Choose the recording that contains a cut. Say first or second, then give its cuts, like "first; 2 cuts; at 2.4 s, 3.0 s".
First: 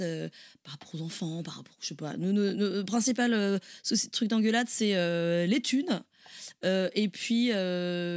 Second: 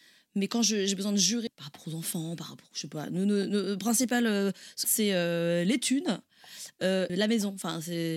second; 3 cuts; at 1.5 s, 4.8 s, 7.1 s